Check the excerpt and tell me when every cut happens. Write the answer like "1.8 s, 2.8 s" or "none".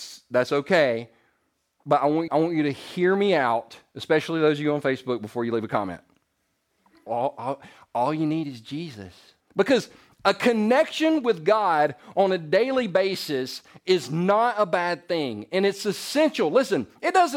2.3 s, 7.1 s, 9.4 s